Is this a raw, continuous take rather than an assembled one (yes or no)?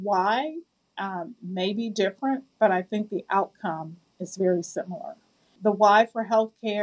yes